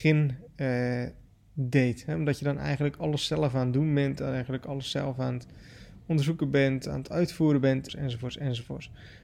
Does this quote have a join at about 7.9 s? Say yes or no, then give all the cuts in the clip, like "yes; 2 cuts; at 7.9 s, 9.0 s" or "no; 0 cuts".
yes; 1 cut; at 7.9 s